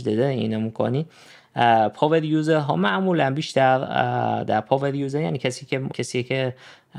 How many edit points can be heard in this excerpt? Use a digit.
1